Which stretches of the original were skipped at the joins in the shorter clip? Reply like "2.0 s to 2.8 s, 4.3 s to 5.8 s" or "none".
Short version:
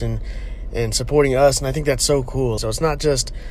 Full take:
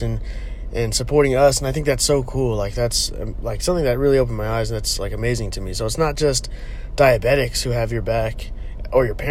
2.6 s to 5.7 s